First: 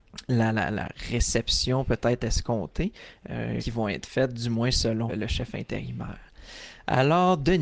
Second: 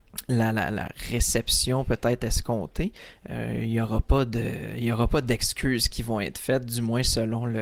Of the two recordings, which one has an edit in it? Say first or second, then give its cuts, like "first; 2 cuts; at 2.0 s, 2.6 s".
first; 2 cuts; at 3.6 s, 5.1 s